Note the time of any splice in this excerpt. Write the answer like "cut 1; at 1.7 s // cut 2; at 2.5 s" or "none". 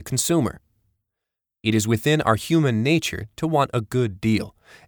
cut 1; at 1.4 s

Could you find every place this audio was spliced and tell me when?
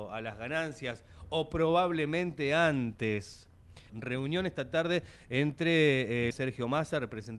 cut 1; at 3.9 s // cut 2; at 6.3 s

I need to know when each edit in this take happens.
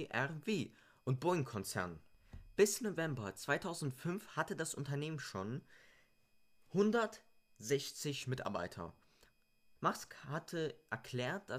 cut 1; at 9.8 s

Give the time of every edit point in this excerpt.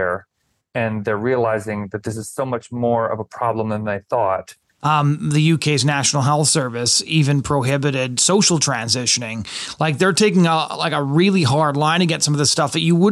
cut 1; at 4.8 s

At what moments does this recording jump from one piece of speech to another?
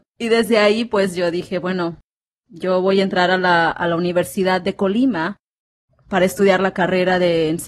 none

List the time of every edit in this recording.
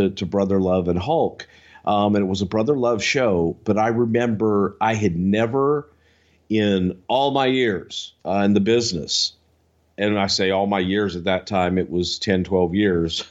cut 1; at 8.2 s

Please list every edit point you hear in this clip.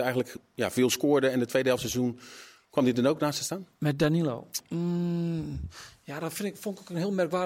cut 1; at 4.6 s

